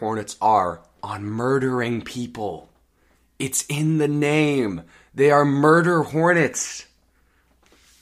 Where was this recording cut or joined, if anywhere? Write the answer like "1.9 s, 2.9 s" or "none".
none